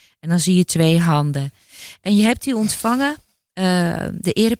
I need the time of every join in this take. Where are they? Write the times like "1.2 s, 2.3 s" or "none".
none